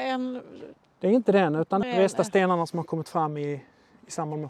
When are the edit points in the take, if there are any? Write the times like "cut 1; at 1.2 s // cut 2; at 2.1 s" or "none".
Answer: cut 1; at 1.8 s